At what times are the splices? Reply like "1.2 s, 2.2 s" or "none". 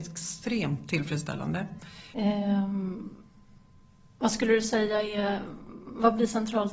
2.1 s